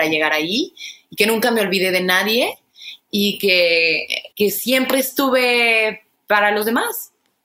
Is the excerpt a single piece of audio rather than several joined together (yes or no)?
no